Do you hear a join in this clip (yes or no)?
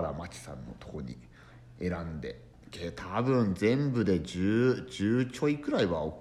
no